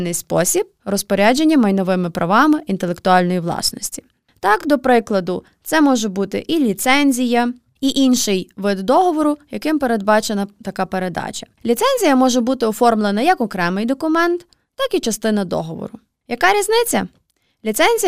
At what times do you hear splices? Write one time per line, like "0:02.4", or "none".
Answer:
none

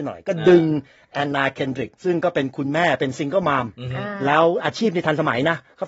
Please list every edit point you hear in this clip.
0:02.0

